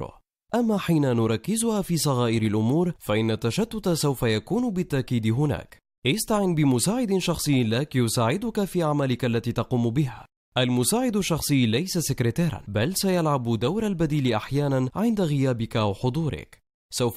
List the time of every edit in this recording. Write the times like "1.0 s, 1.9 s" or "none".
6.0 s

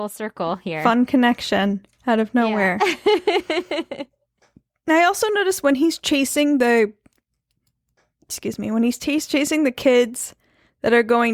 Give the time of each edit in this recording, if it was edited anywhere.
none

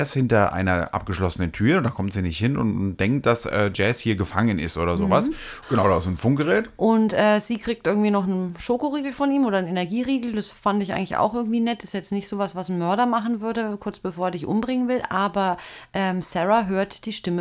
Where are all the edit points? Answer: 5.6 s

